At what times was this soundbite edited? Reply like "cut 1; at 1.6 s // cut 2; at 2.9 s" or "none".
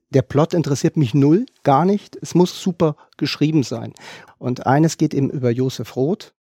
cut 1; at 2.5 s // cut 2; at 4.3 s